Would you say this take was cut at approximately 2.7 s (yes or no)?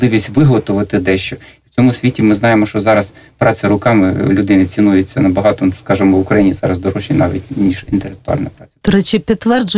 no